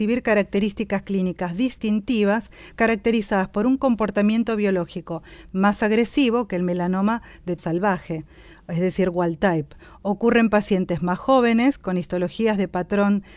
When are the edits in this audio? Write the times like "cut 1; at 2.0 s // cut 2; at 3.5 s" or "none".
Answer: cut 1; at 7.6 s